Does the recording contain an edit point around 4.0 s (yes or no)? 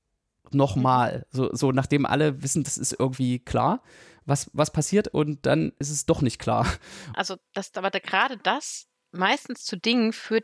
no